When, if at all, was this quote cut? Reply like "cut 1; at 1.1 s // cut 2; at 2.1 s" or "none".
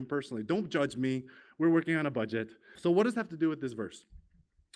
cut 1; at 2.8 s